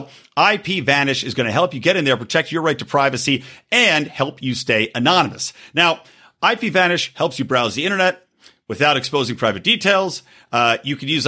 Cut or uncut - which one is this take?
uncut